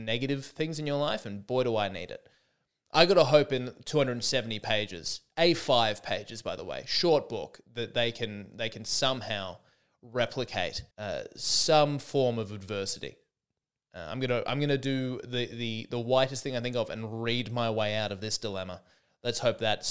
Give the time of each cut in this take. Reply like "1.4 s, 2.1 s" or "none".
10.9 s